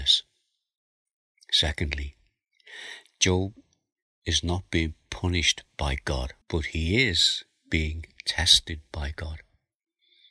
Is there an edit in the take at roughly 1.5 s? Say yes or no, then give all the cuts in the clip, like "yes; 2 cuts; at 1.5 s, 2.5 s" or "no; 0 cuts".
no; 1 cut; at 6.4 s